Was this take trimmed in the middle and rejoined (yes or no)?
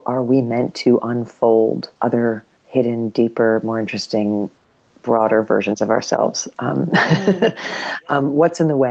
yes